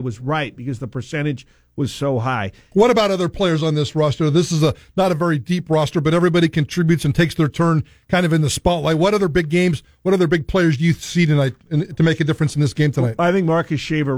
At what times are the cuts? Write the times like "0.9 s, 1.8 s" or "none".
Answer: 2.7 s

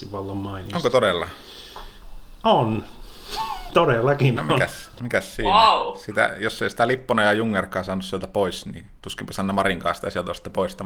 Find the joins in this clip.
none

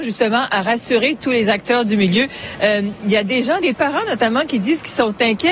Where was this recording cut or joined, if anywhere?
none

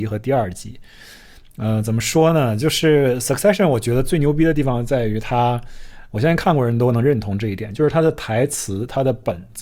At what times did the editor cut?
none

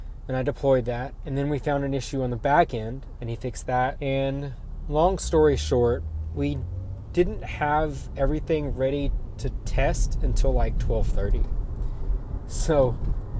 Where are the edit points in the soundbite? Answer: 3.2 s

